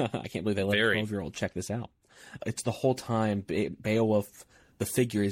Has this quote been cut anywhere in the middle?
yes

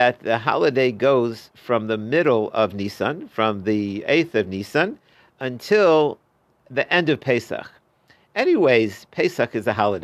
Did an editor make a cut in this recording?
no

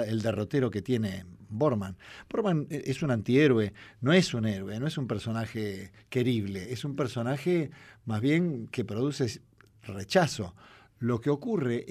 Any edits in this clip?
no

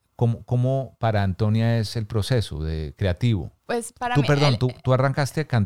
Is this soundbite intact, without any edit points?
no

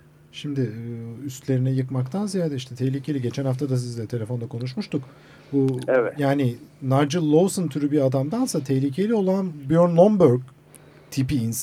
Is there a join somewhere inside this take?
no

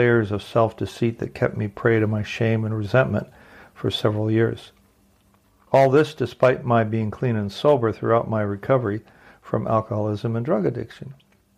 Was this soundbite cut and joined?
no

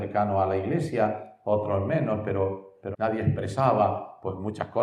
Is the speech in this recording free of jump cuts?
no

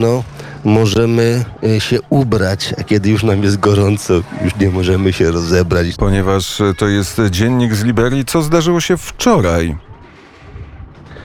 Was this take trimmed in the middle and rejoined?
yes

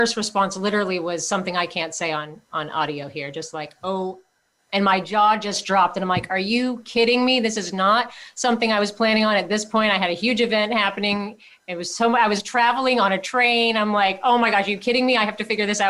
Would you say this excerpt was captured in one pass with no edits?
yes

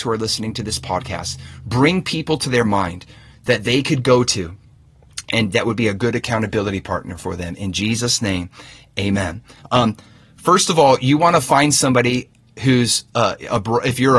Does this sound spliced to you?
yes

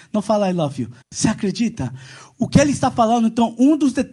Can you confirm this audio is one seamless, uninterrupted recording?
no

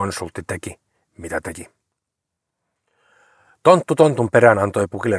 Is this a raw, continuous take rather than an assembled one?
yes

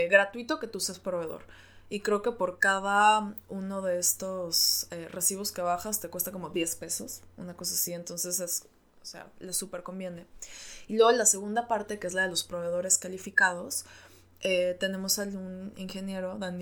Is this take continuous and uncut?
yes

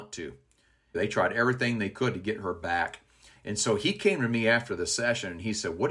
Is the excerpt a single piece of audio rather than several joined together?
no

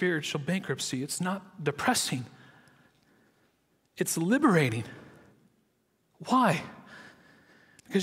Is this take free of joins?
yes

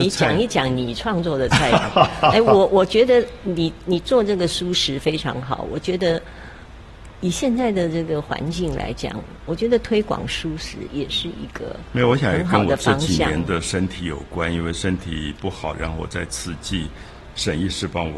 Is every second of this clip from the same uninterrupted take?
yes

